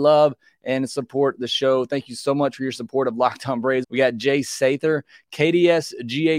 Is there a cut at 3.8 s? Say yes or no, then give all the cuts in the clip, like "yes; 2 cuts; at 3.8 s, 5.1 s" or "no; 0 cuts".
yes; 1 cut; at 3.8 s